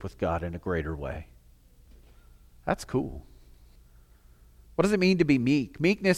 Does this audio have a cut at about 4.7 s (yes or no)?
yes